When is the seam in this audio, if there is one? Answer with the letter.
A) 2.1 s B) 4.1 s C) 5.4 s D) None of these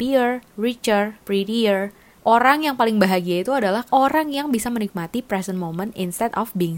A